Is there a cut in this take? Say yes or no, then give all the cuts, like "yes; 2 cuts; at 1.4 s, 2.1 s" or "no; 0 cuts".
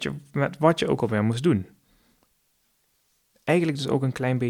no; 0 cuts